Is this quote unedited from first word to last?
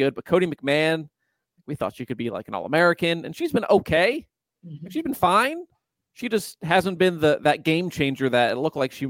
yes; 0 cuts

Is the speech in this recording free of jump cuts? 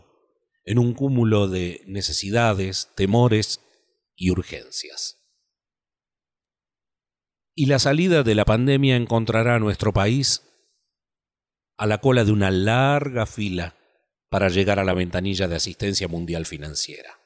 yes; 0 cuts

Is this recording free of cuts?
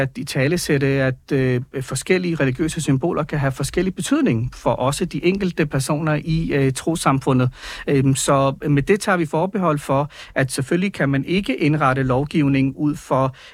yes; 0 cuts

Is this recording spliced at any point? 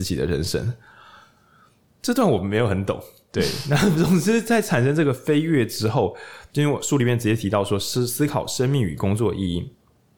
no; 0 cuts

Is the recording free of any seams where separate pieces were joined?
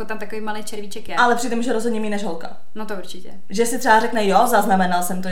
yes; 0 cuts

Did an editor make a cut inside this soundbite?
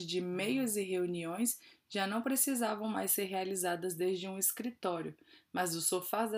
no; 0 cuts

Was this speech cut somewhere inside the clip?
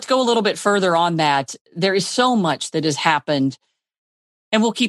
no; 0 cuts

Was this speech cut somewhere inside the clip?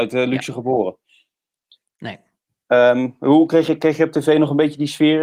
no; 0 cuts

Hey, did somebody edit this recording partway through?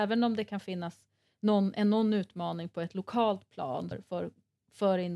yes; 1 cut; at 3.9 s

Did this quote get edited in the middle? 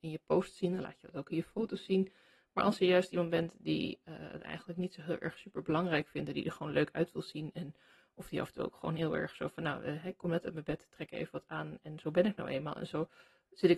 no; 0 cuts

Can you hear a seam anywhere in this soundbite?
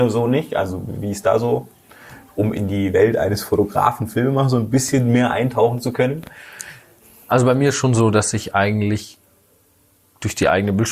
no; 0 cuts

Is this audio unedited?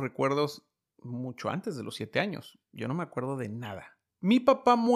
yes; 0 cuts

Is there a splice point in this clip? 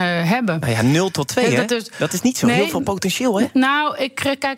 no; 0 cuts

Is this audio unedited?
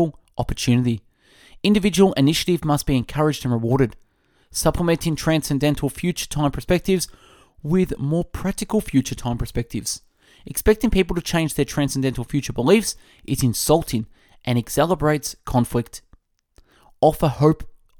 yes; 0 cuts

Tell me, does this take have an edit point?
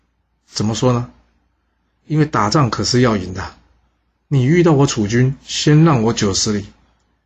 no; 0 cuts

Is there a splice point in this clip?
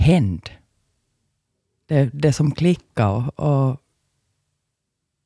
no; 0 cuts

